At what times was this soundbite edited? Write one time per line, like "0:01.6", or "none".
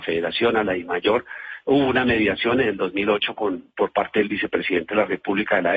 none